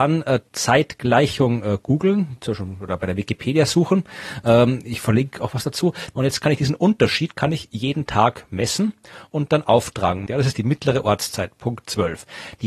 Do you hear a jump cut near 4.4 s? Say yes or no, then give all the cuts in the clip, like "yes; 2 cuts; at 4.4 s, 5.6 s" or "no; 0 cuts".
no; 2 cuts; at 6.1 s, 10.3 s